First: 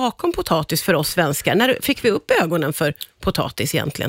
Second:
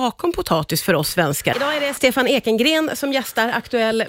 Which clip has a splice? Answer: second; 1 cut; at 1.5 s

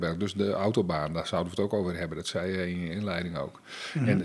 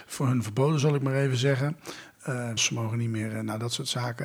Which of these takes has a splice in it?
second; 1 cut; at 2.6 s

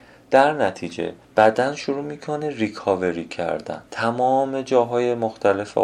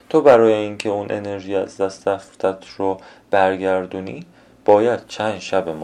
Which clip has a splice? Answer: first; 2 cuts; at 1.2 s, 3.9 s

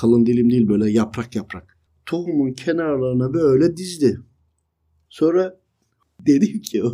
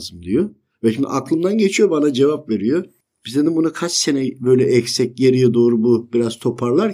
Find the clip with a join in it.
first; 1 cut; at 5.0 s

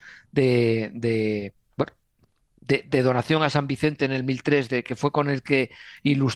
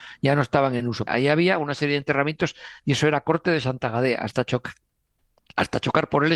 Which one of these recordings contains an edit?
second; 1 cut; at 1.1 s

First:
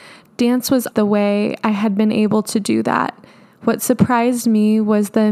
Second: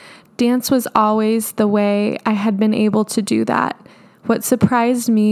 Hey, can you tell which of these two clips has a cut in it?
first; 1 cut; at 0.9 s

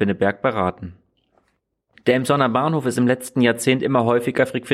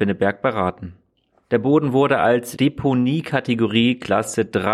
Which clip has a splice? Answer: second; 1 cut; at 1.5 s

